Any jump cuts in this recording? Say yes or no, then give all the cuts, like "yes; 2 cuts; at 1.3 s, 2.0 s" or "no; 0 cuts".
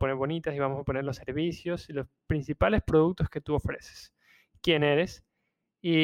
no; 0 cuts